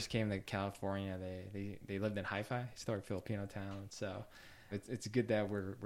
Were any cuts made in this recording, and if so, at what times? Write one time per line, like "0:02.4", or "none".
0:04.7